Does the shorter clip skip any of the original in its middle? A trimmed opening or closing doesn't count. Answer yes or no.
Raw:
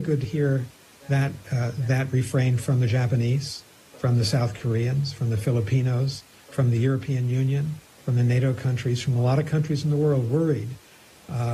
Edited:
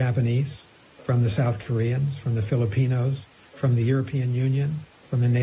no